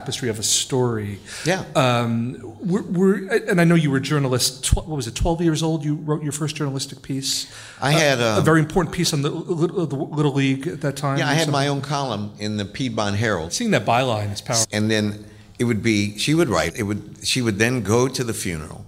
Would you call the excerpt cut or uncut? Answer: cut